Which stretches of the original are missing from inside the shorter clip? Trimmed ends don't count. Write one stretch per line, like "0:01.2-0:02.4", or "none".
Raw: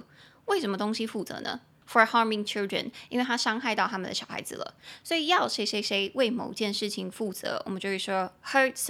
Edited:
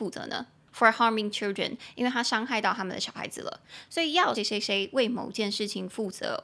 0:05.5-0:05.6